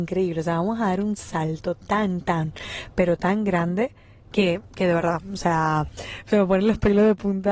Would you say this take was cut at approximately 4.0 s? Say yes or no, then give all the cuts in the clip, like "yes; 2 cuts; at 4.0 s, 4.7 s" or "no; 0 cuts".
no; 0 cuts